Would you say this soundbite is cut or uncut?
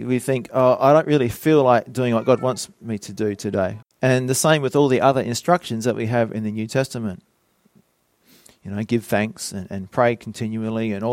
cut